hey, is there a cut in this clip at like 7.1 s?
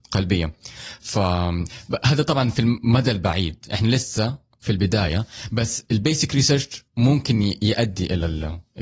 no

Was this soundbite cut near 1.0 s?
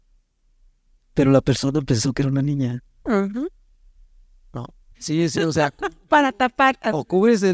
no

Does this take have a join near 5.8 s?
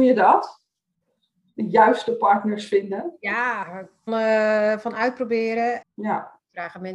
yes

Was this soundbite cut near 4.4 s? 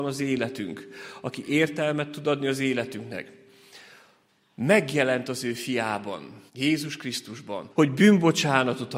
no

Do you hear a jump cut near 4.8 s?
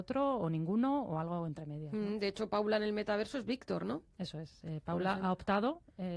no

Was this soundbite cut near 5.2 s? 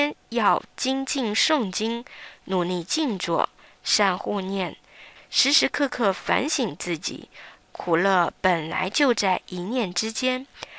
yes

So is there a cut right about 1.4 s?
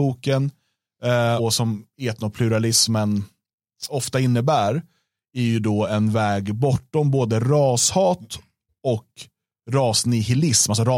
yes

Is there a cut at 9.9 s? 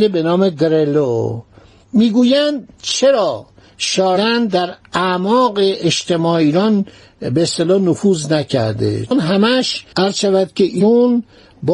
yes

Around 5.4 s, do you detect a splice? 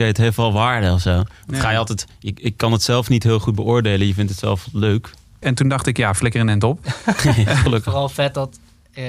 yes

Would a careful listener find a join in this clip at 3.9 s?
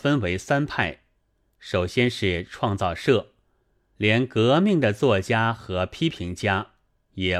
yes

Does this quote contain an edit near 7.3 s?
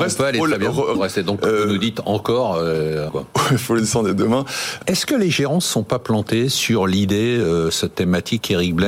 no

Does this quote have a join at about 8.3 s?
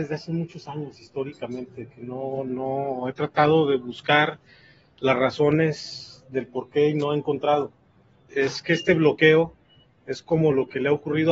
yes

